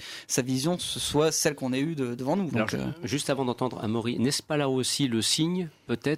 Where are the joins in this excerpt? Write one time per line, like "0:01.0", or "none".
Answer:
0:02.5